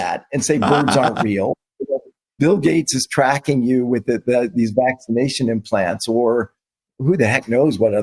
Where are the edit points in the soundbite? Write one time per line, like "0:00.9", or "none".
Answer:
none